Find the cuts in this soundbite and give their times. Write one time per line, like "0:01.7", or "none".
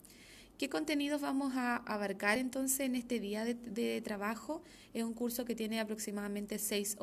none